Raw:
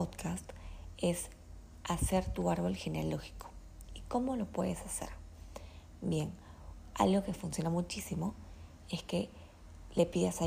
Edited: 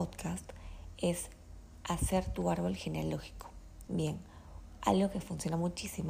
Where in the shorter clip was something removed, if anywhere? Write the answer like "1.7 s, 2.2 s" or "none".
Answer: 3.9 s